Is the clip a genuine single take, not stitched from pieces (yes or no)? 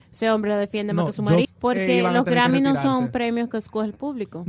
no